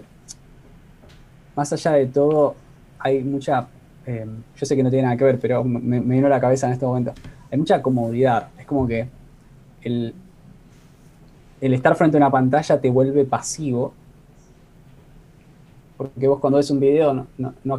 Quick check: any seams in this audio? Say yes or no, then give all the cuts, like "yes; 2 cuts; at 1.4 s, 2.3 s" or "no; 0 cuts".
no; 0 cuts